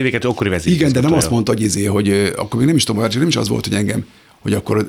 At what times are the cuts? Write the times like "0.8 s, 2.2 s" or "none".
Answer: none